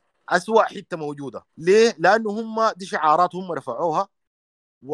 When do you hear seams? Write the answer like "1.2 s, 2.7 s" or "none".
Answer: 1.5 s